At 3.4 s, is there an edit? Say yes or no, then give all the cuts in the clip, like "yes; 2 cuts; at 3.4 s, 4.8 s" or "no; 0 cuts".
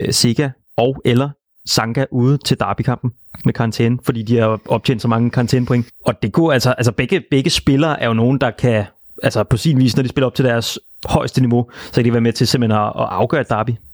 yes; 1 cut; at 3.4 s